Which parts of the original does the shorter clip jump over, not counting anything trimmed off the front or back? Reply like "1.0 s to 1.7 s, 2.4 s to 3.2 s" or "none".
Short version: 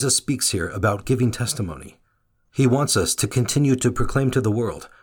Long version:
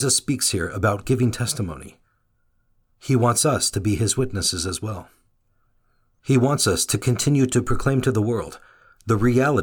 2.5 s to 6.2 s